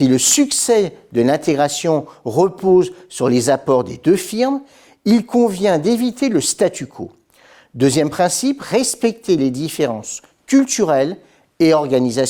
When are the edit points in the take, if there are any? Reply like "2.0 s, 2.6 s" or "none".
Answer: none